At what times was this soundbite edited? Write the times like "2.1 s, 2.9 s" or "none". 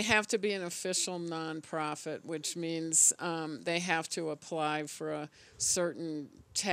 none